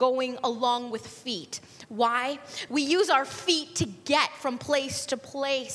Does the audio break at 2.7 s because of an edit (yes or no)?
yes